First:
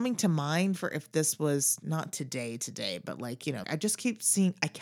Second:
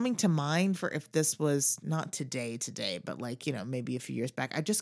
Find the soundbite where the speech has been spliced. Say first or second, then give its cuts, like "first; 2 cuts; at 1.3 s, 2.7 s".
first; 1 cut; at 3.6 s